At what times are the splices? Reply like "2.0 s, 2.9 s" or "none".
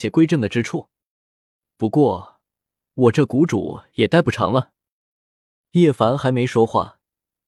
5.1 s